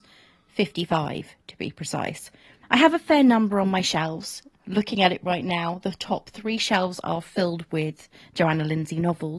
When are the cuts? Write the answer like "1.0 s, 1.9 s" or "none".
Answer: 2.6 s